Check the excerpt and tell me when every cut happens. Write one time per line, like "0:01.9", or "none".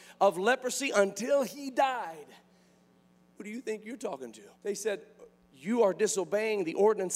0:03.4
0:04.5